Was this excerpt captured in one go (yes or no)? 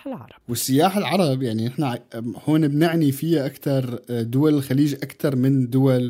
yes